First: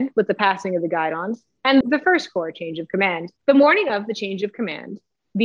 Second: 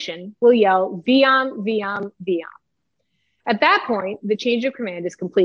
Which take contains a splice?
first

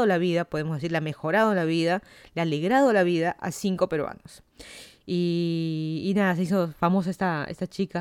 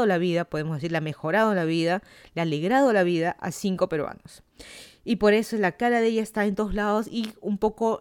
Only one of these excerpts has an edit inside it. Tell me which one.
first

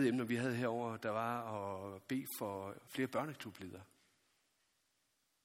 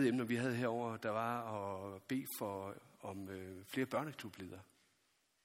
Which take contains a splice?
first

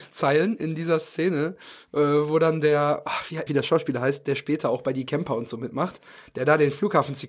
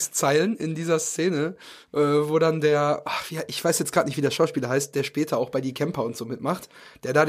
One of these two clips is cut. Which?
first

